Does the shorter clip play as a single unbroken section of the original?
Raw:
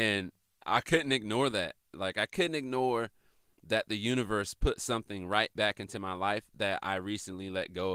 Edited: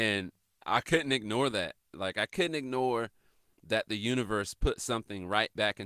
yes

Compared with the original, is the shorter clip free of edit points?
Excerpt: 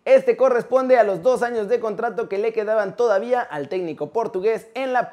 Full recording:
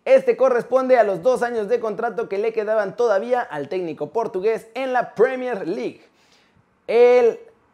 yes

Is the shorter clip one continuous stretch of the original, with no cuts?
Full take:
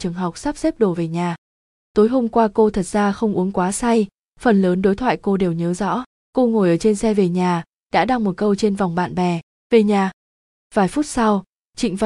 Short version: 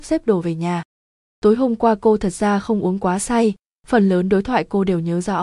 yes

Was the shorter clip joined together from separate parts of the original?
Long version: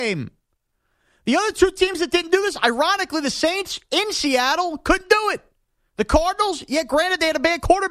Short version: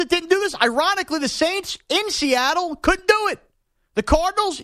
no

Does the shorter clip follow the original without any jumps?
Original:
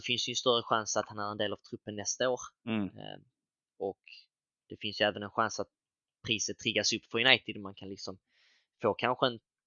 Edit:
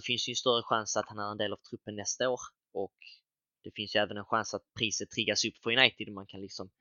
no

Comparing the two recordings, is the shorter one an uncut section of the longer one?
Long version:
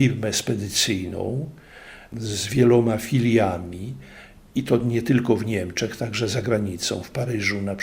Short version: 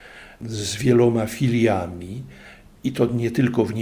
yes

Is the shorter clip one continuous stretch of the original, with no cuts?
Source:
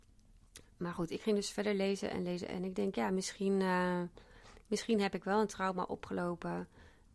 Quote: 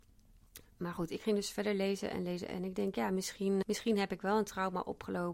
no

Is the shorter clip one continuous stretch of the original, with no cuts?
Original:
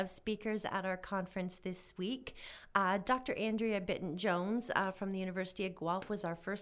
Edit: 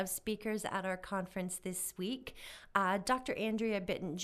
yes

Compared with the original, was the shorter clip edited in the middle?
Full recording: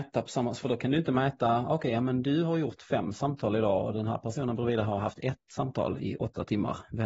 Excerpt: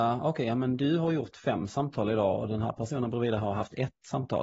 no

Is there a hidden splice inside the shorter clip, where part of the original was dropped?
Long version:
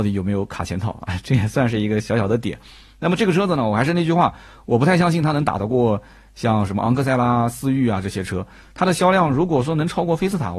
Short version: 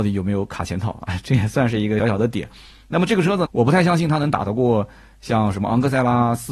yes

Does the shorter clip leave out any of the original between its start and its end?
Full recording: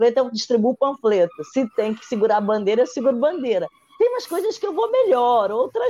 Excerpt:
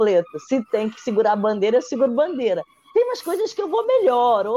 no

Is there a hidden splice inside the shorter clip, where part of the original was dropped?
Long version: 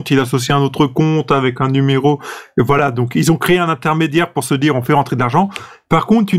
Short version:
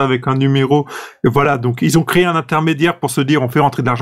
no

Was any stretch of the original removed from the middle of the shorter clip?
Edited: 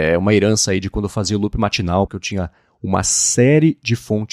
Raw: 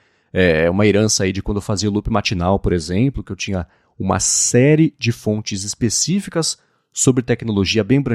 yes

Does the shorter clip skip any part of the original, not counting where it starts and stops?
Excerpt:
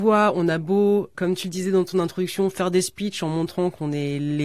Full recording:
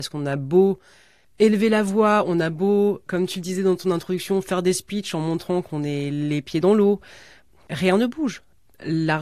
no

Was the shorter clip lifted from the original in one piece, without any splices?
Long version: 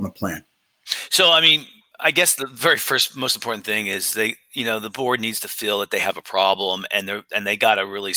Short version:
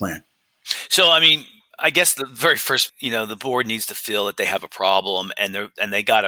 no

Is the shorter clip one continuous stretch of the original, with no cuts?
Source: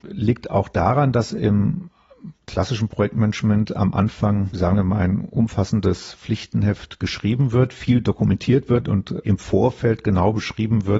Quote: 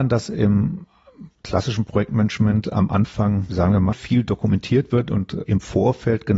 no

